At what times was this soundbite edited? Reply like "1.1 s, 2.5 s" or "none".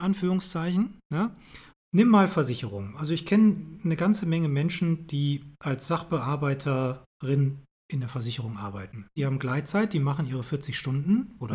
1.7 s, 9.2 s